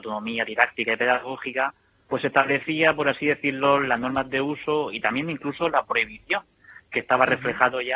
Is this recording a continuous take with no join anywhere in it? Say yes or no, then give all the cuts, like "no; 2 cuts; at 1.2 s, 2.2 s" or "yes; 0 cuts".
yes; 0 cuts